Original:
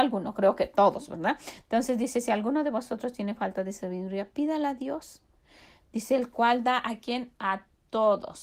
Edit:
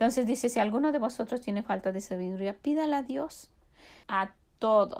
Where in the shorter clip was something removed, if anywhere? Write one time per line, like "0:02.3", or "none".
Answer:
0:04.0